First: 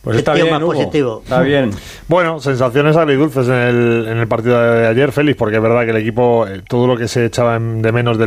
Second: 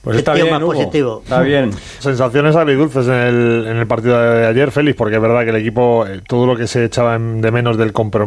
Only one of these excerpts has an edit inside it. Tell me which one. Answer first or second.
second